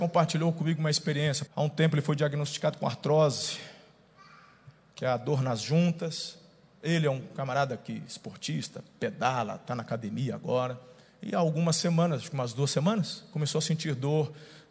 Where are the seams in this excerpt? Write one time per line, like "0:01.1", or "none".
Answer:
0:01.5